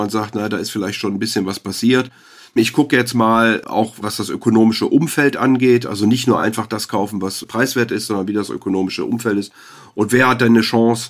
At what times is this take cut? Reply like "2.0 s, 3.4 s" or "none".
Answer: none

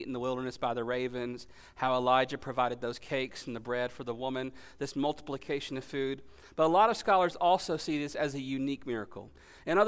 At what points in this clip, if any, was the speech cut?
none

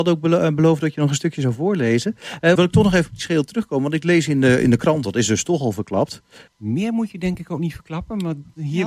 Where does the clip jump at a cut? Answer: 2.6 s, 6.5 s

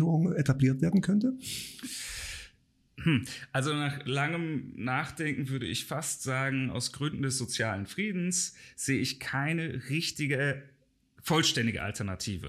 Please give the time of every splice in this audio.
none

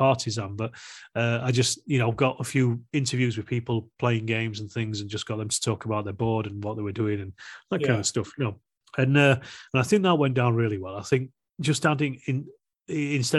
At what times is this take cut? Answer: none

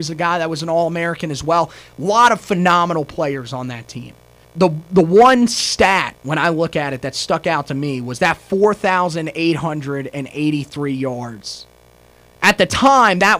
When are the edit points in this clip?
4.4 s

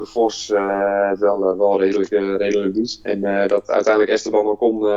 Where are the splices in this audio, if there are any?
none

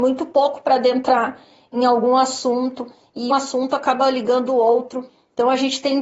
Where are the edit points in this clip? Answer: 3.3 s

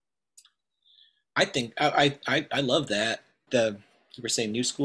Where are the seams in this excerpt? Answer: 3.5 s

